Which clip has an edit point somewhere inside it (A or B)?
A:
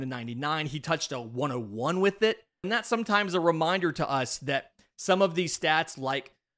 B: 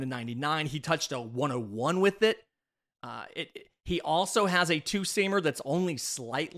A